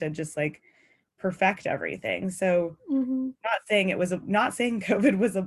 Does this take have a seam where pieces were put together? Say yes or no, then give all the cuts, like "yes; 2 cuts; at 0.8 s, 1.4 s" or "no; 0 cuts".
no; 0 cuts